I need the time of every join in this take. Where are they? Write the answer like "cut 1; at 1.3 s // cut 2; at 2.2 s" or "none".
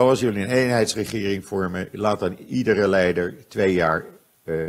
none